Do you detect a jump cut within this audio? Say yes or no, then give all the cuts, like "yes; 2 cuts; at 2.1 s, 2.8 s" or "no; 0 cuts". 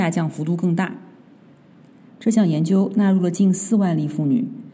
yes; 1 cut; at 2.1 s